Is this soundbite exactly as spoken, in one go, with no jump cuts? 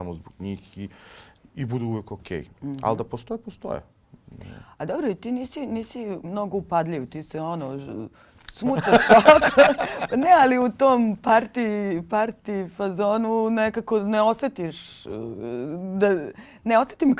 yes; 0 cuts

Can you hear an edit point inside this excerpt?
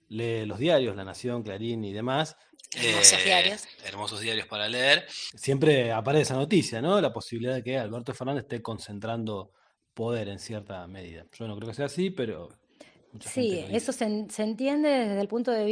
no; 0 cuts

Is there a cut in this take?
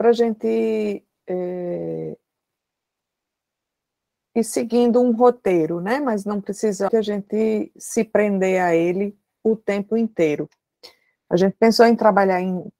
yes; 2 cuts; at 6.9 s, 11.1 s

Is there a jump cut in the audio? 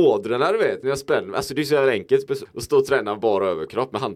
yes; 1 cut; at 2.5 s

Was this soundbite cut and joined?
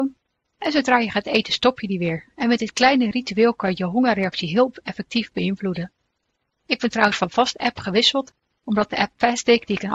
no; 0 cuts

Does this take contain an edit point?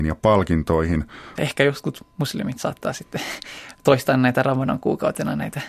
yes; 1 cut; at 1.4 s

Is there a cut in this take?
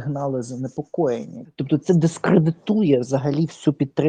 yes; 1 cut; at 1.5 s

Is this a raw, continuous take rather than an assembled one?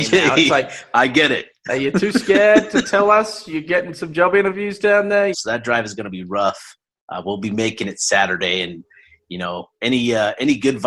no; 1 cut; at 5.3 s

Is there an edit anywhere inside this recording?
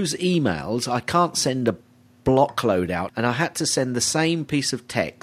yes; 1 cut; at 3.1 s

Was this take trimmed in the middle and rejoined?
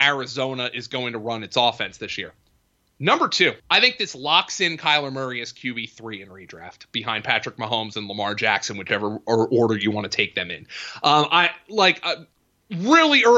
yes; 1 cut; at 3.6 s

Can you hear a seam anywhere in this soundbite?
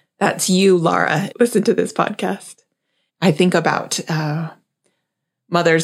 yes; 2 cuts; at 1.3 s, 3.1 s

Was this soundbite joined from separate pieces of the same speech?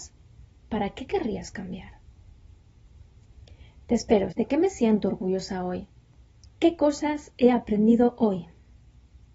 yes; 2 cuts; at 4.3 s, 6.4 s

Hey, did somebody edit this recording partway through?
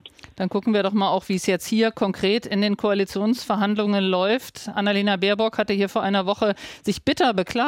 no; 0 cuts

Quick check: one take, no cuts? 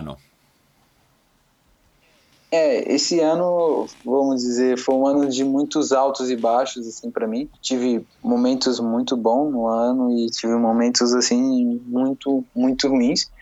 no; 1 cut; at 7.6 s

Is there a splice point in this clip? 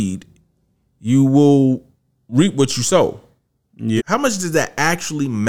yes; 1 cut; at 4.0 s

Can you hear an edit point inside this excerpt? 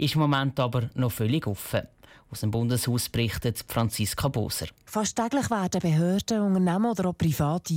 yes; 1 cut; at 4.9 s

